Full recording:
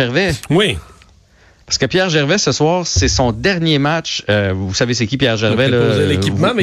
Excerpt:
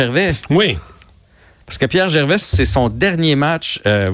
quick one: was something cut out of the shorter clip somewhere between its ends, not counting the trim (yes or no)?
yes